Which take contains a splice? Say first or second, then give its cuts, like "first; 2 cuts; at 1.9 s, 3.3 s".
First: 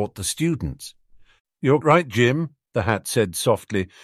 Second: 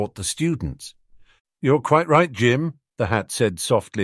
first; 1 cut; at 1.8 s